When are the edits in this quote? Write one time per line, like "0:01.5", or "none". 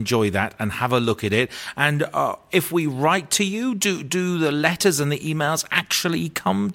none